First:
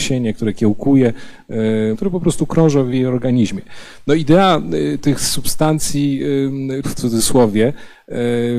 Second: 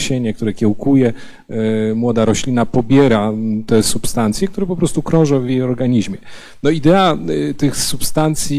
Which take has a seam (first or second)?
first